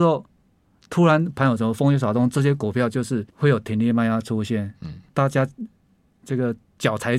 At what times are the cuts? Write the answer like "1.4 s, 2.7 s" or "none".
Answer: 3.3 s

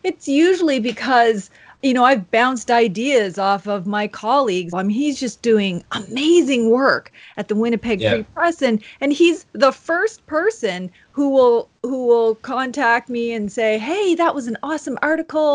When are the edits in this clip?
4.7 s

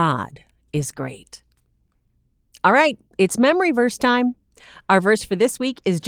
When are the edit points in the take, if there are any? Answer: none

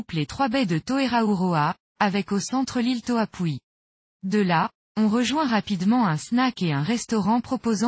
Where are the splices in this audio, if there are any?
1.9 s, 4.1 s

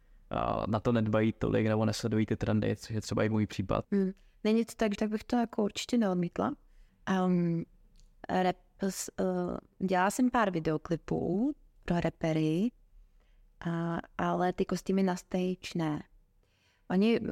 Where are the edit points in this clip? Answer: 3.8 s, 4.9 s, 6.9 s

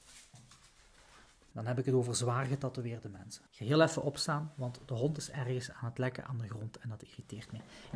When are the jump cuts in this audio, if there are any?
1.5 s, 3.5 s

